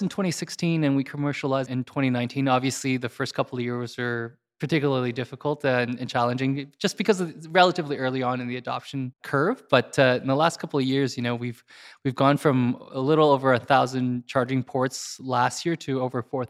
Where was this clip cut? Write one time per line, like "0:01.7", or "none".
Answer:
none